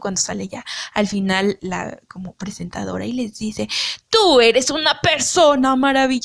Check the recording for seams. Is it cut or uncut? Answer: cut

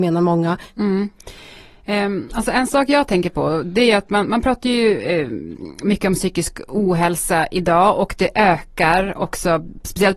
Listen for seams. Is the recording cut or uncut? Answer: uncut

